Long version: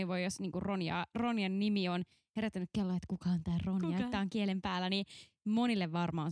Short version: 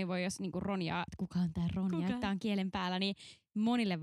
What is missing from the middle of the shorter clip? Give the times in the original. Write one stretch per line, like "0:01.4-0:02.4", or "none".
0:01.1-0:03.0